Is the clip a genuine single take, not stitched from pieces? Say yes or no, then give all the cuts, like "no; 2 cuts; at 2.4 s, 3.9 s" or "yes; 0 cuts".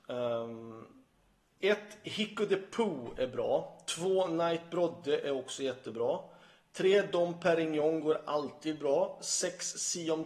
yes; 0 cuts